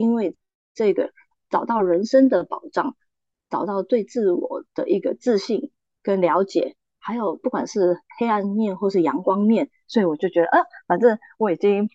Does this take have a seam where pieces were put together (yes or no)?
yes